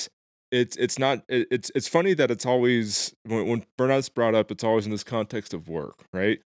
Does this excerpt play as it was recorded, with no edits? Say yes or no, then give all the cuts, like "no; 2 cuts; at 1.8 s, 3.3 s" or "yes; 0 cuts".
yes; 0 cuts